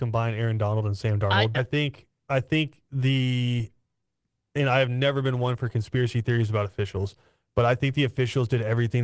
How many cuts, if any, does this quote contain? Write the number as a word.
one